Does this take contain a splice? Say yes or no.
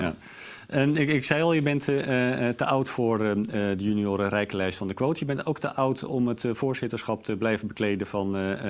no